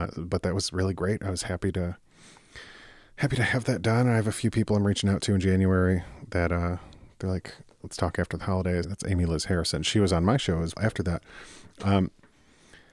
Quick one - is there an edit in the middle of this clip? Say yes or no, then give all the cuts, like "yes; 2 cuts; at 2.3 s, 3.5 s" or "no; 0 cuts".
yes; 2 cuts; at 8.8 s, 10.7 s